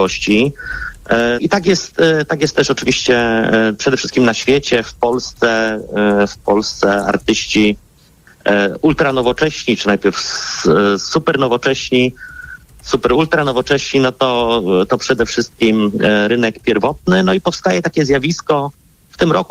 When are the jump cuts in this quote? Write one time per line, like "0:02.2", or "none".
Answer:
0:01.4